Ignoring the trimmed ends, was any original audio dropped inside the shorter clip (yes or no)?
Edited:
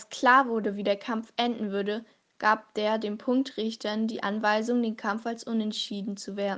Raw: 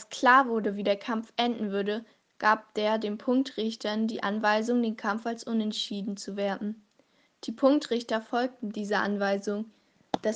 no